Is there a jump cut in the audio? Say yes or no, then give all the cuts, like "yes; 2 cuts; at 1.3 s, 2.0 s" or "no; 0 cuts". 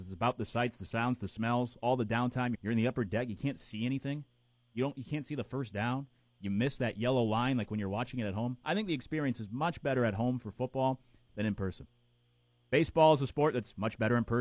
yes; 1 cut; at 2.5 s